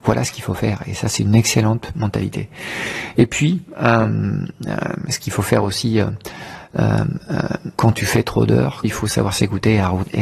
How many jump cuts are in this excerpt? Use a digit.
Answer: 2